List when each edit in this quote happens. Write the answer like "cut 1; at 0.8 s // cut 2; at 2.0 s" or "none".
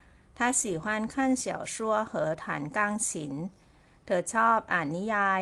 none